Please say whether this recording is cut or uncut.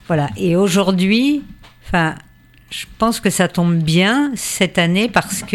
uncut